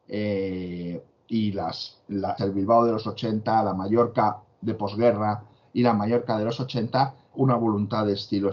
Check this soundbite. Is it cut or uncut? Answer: cut